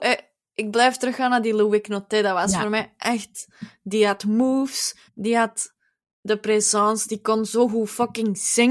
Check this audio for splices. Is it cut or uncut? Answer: cut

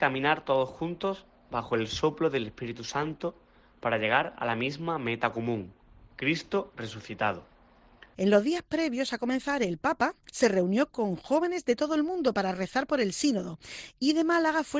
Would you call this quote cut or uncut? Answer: cut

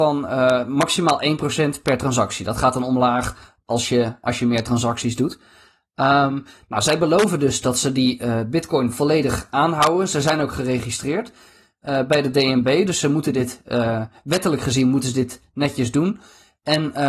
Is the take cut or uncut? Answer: uncut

